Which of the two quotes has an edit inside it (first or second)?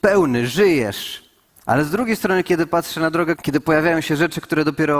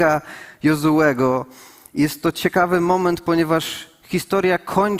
first